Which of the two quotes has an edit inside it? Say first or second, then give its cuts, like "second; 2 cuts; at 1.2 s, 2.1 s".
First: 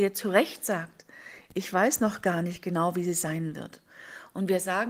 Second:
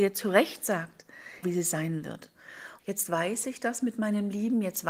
second; 2 cuts; at 1.4 s, 2.8 s